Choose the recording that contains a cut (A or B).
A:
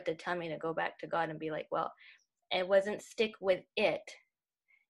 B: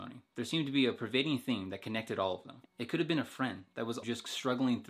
B